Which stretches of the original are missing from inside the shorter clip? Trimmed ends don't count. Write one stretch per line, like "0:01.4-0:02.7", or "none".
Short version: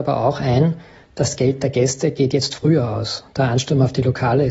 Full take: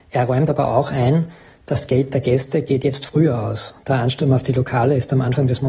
none